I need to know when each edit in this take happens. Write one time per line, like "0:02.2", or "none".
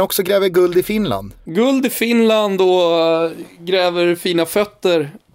0:01.4